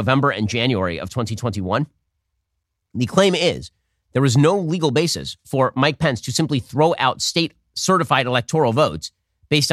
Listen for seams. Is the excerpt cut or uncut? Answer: uncut